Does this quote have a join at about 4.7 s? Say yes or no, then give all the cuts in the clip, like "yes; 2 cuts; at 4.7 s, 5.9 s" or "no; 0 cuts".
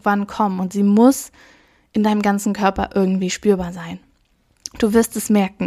no; 0 cuts